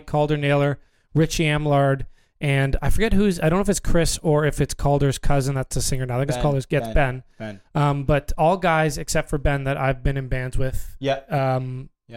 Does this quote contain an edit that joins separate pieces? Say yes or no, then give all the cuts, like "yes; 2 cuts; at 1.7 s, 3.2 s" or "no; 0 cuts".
no; 0 cuts